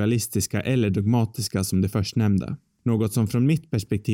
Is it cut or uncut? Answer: uncut